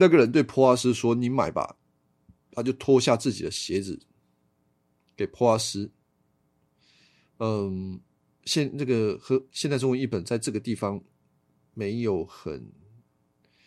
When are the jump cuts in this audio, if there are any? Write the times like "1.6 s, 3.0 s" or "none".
none